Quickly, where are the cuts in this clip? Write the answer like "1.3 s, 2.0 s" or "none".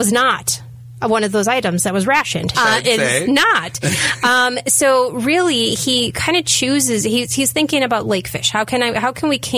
2.5 s

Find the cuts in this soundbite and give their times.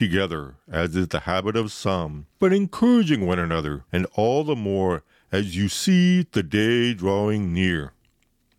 2.3 s, 3.9 s

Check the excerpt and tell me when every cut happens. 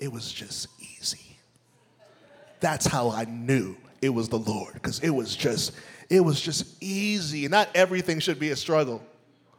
7.5 s

